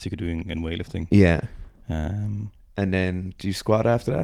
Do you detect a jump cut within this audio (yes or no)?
no